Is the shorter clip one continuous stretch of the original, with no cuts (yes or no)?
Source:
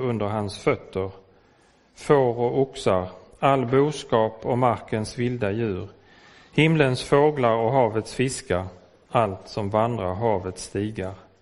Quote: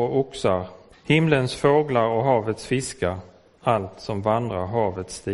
no